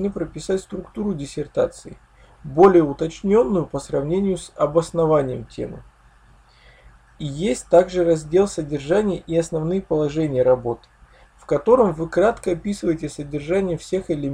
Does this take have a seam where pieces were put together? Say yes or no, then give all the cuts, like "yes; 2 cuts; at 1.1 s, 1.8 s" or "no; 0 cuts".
no; 0 cuts